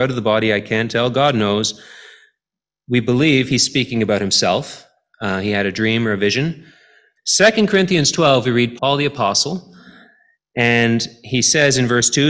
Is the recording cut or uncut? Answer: cut